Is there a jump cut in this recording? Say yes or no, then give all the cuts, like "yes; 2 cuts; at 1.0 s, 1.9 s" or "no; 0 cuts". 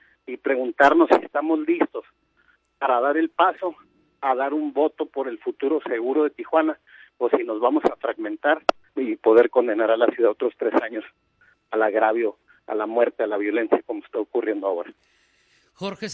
yes; 1 cut; at 8.9 s